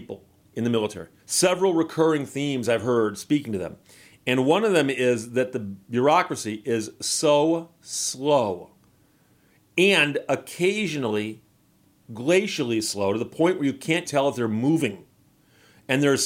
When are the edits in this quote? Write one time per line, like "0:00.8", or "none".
0:01.2
0:14.1